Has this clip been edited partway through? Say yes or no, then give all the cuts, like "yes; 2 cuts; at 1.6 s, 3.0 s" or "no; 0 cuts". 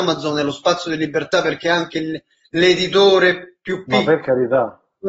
no; 0 cuts